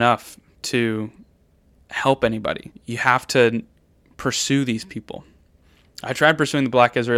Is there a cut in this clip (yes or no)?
no